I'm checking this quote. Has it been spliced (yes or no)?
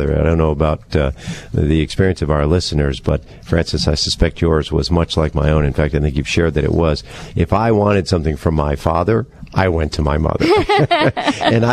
no